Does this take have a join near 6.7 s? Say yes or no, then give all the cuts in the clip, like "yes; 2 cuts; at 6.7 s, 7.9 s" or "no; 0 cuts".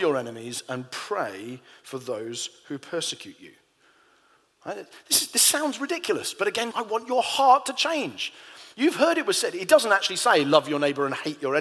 yes; 1 cut; at 6.7 s